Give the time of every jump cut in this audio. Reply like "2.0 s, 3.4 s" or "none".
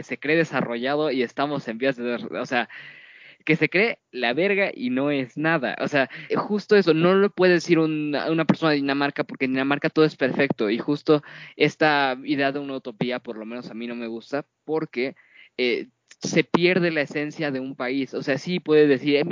6.3 s